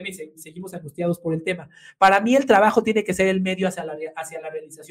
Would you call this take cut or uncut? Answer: uncut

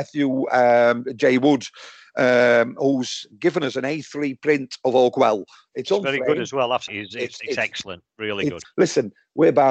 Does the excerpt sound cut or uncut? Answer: cut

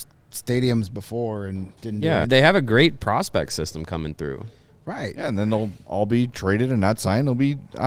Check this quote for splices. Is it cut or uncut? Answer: cut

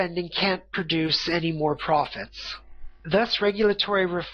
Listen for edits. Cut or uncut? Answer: cut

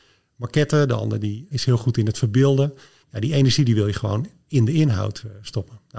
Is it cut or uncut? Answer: cut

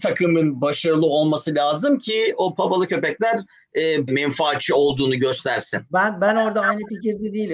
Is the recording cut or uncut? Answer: cut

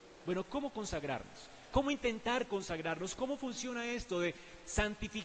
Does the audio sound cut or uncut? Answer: uncut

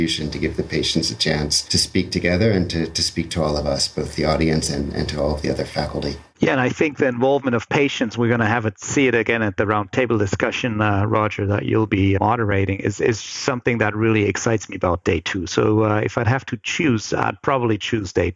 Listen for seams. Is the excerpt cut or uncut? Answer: uncut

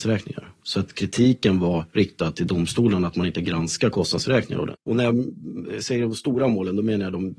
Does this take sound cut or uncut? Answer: cut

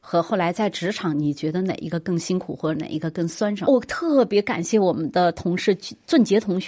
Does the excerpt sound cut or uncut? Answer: cut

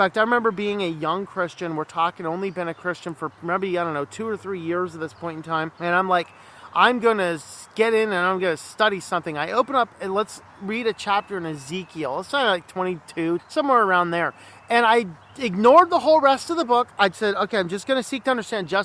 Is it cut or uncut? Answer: cut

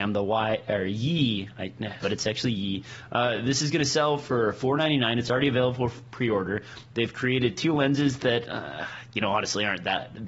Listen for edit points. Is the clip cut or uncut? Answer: cut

